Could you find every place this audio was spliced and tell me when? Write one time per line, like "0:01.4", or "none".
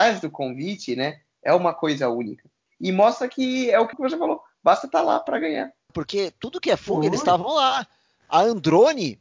0:03.9
0:05.9